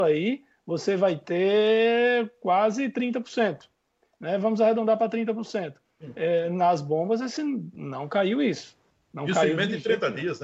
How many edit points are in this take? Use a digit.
0